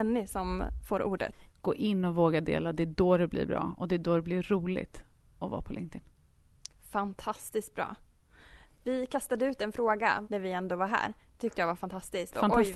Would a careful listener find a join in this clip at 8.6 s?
yes; 3 cuts; at 1.5 s, 8.6 s, 10.2 s

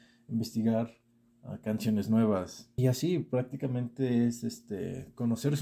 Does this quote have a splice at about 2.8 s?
yes; 1 cut; at 2.8 s

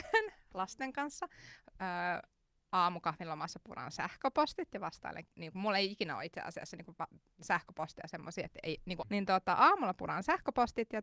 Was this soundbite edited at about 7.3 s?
no; 2 cuts; at 5.3 s, 9.0 s

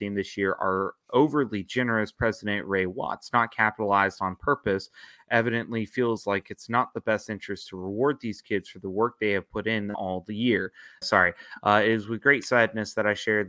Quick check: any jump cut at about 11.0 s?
yes; 1 cut; at 11.0 s

